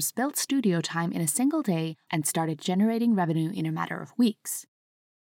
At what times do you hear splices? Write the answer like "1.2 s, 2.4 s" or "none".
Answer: 2.1 s